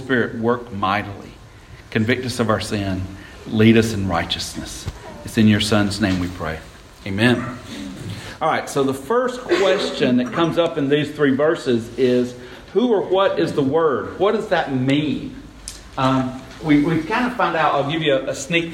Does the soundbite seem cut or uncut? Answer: cut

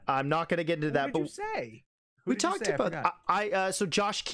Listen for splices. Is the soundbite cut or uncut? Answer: uncut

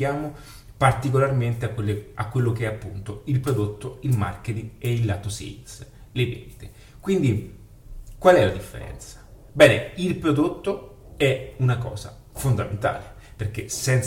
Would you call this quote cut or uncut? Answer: uncut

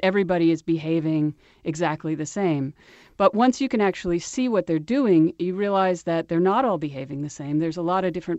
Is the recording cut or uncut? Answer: uncut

